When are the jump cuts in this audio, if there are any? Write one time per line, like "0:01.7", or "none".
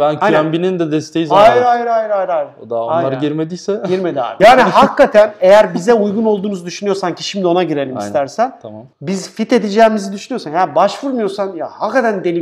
0:04.4
0:08.9